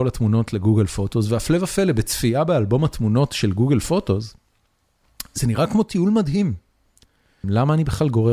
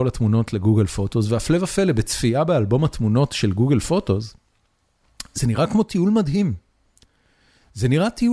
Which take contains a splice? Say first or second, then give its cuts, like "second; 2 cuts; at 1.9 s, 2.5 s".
first; 1 cut; at 7.4 s